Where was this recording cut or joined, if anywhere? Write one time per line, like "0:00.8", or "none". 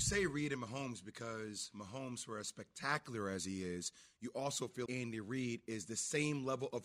0:04.9